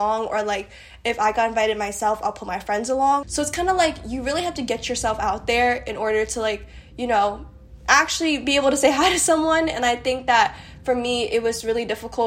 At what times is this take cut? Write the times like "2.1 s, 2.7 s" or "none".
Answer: 3.2 s

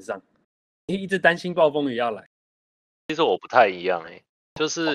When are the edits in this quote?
none

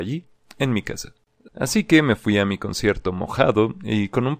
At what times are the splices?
1.5 s

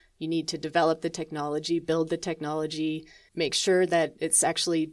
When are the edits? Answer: 3.3 s

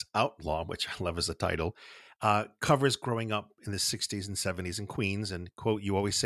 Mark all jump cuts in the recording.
none

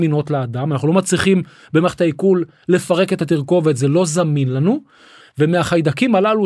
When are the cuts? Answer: 5.2 s

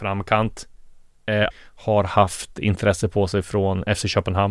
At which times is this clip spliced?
1.5 s

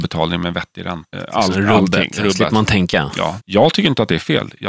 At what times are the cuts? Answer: 1.1 s, 3.4 s

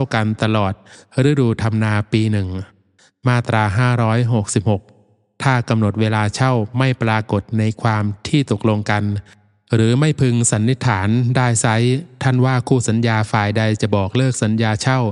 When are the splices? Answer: none

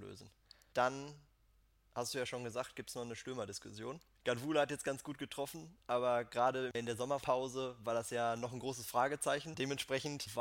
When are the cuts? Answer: none

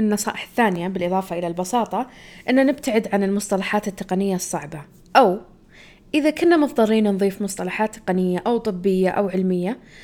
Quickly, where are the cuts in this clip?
none

